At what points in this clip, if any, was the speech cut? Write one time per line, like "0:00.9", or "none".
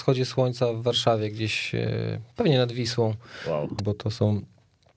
0:03.8